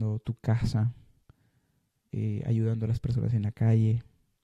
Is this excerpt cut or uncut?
uncut